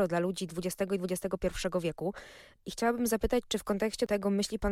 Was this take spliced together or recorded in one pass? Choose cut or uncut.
uncut